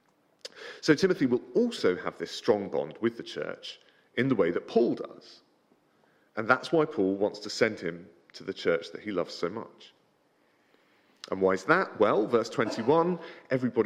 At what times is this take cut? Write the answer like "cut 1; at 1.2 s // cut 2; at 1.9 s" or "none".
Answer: none